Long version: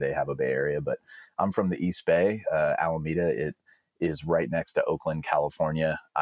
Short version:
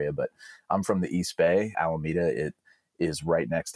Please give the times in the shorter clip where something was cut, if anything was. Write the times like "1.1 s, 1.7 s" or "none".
1.7 s